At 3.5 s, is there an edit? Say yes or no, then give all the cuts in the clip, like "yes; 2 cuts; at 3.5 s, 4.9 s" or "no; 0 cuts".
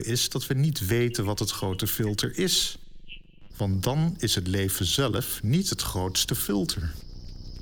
yes; 1 cut; at 3.5 s